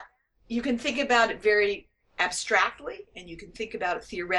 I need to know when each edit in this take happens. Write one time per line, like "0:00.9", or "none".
none